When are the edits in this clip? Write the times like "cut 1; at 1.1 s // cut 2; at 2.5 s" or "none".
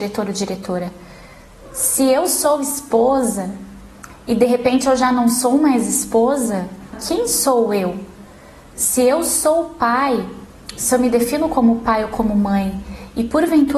cut 1; at 6.9 s